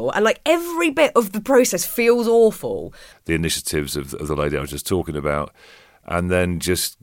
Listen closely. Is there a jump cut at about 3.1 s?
yes; 1 cut; at 3.1 s

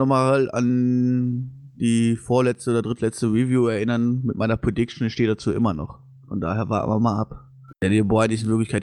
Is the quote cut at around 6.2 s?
no; 1 cut; at 7.7 s

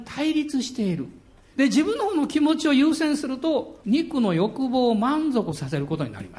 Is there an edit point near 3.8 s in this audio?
yes; 2 cuts; at 1.5 s, 3.8 s

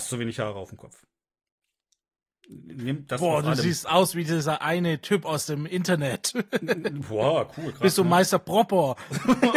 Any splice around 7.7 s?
no; 0 cuts

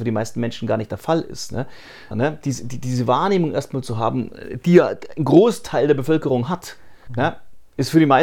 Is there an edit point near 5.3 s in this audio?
no; 2 cuts; at 2.1 s, 7.1 s

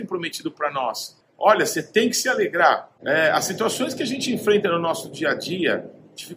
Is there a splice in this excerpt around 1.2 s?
yes; 1 cut; at 1.2 s

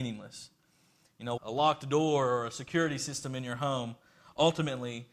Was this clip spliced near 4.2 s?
no; 1 cut; at 1.4 s

